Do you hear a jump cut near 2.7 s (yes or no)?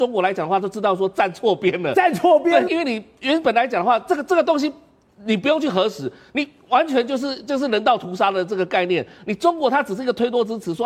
yes